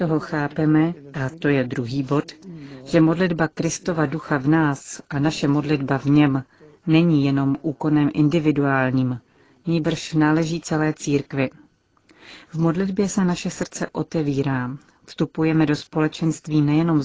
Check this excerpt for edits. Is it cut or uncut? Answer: uncut